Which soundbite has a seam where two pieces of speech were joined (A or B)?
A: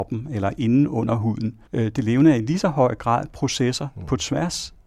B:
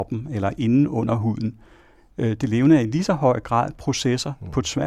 A